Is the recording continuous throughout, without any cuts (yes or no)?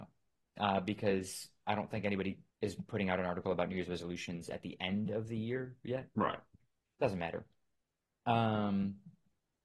no